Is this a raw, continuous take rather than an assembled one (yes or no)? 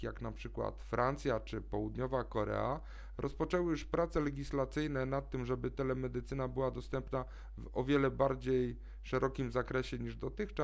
yes